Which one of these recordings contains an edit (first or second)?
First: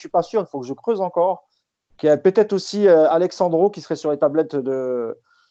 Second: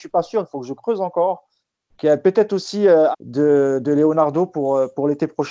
second